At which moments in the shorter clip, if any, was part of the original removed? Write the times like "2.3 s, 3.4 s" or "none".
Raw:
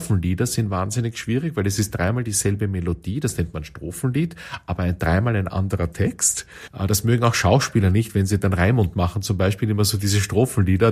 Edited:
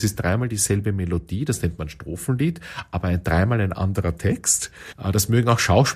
none

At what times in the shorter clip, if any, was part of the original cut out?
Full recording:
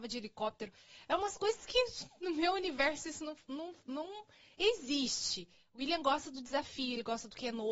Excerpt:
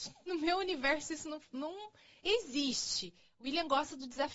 1.5 s

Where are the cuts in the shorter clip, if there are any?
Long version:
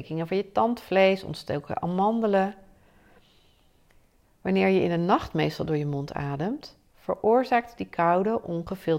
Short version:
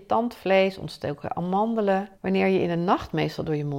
2.1 s

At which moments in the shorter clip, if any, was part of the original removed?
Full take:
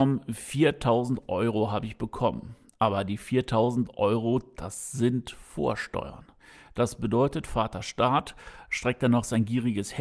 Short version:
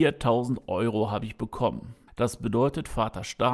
2.1 s

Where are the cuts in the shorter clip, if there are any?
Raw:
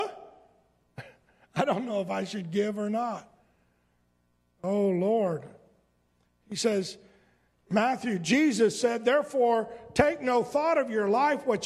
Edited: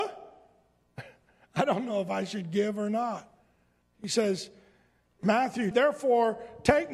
3.8 s, 5.7 s

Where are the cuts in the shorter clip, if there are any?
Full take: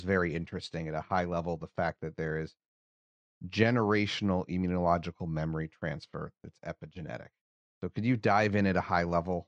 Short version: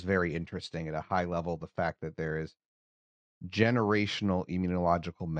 none

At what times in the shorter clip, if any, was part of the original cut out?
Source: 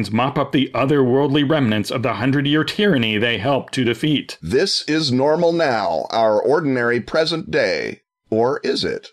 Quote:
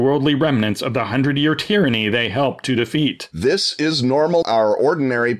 4.4 s

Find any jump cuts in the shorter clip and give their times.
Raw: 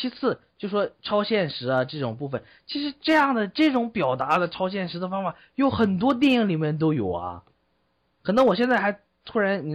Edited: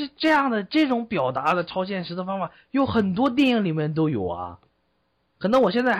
none

